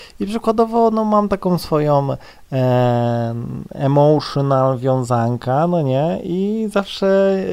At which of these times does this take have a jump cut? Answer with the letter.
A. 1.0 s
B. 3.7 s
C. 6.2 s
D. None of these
D